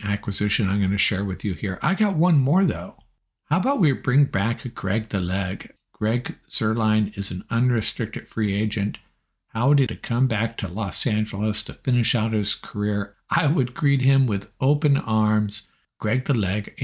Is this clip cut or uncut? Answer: cut